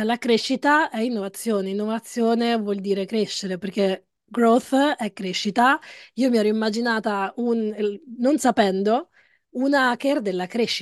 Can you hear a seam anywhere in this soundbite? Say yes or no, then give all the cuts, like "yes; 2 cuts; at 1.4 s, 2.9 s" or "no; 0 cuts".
no; 0 cuts